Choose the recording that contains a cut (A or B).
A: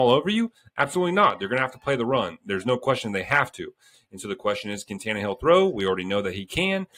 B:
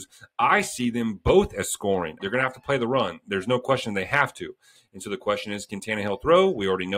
B